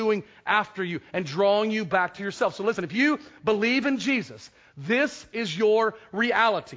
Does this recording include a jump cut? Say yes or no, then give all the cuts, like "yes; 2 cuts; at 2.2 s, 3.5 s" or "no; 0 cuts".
no; 0 cuts